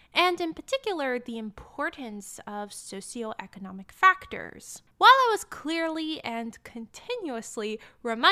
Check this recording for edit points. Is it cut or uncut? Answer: cut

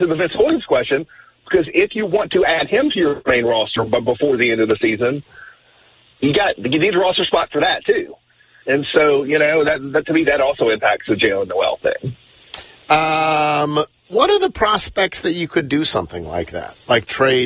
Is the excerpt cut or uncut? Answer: uncut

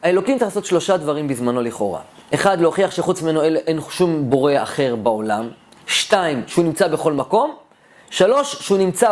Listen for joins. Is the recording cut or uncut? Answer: uncut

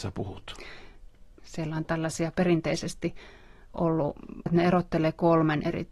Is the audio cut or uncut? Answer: cut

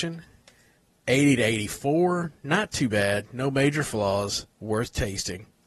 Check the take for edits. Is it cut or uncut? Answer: cut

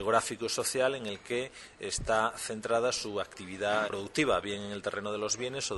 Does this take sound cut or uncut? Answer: cut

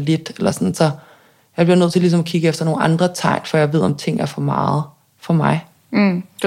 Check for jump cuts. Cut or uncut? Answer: uncut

